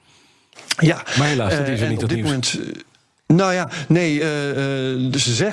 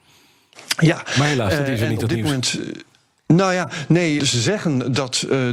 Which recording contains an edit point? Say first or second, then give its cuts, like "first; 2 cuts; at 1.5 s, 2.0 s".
second; 1 cut; at 4.2 s